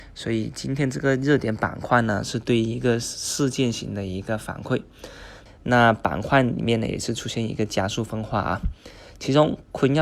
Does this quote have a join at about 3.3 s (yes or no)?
no